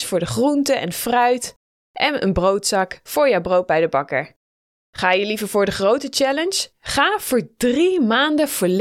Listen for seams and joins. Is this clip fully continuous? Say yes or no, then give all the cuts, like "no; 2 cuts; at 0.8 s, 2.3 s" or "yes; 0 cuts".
no; 1 cut; at 6.7 s